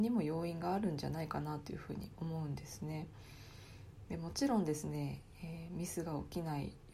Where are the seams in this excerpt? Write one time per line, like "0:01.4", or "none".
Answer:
0:04.1